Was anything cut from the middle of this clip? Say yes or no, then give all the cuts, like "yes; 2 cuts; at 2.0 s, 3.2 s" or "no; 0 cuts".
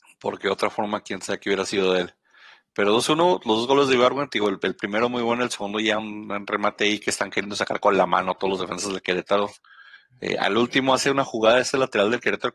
no; 0 cuts